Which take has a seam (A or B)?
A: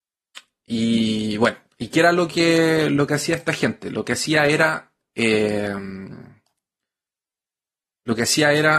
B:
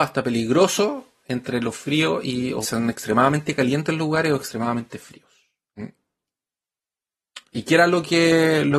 B